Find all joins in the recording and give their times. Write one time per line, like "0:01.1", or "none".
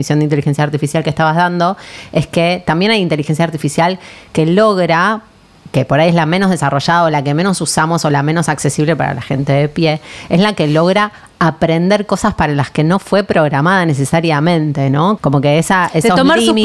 0:15.2